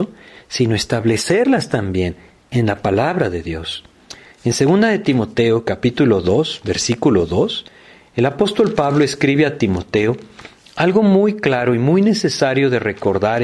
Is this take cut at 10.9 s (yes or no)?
no